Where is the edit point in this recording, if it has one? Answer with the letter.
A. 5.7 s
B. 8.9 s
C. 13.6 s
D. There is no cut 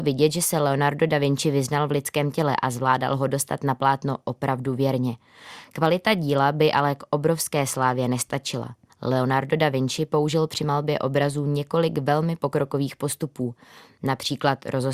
B